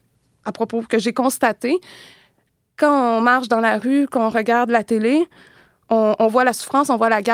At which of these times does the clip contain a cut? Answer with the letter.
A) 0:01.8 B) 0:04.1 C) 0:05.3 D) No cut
D